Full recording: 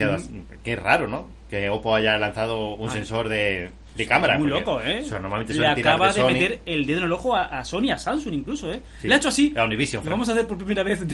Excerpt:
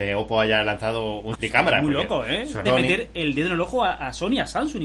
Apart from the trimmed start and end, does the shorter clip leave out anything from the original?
yes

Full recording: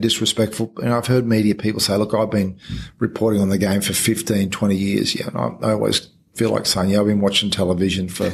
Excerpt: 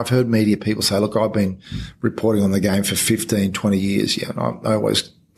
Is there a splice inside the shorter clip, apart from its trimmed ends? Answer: no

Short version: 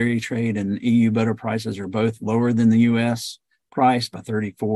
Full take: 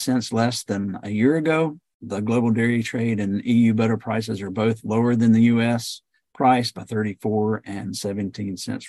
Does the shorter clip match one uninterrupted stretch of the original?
yes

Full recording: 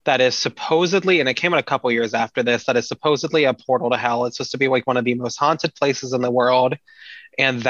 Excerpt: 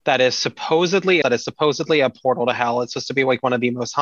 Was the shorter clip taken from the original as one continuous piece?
no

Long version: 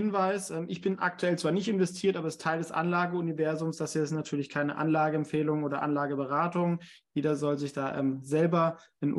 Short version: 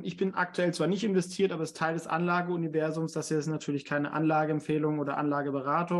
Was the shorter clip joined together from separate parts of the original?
no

